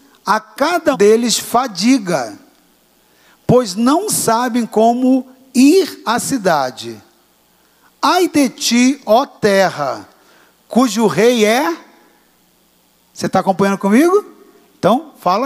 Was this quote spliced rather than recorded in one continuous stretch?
yes; 1 cut; at 0.9 s

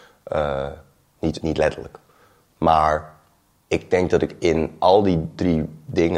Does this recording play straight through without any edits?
no; 1 cut; at 1.4 s

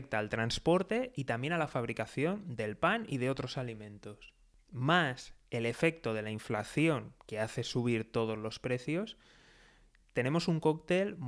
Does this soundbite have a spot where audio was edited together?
no; 0 cuts

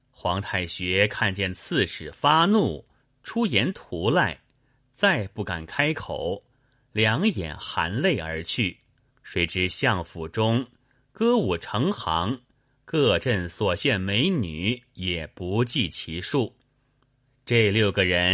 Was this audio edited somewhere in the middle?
yes; 1 cut; at 9.1 s

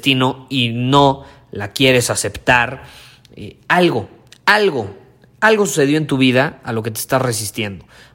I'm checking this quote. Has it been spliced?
no; 0 cuts

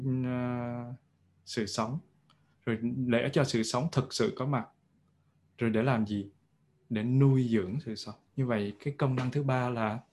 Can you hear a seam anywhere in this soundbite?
yes; 1 cut; at 8.3 s

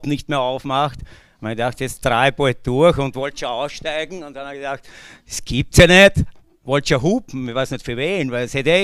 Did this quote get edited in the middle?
no; 0 cuts

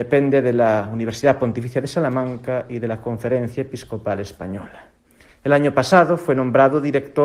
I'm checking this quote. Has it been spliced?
yes; 1 cut; at 5.3 s

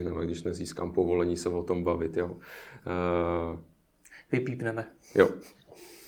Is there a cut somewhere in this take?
no; 0 cuts

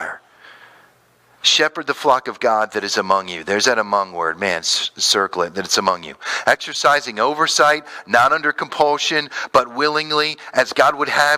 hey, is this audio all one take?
yes; 0 cuts

